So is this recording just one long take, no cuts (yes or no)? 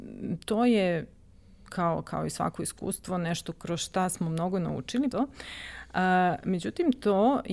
no